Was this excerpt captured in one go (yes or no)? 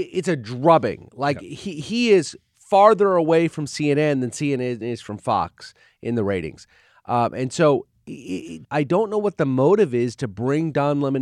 no